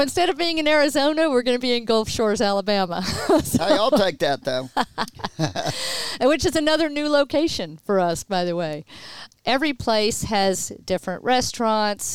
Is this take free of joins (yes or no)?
no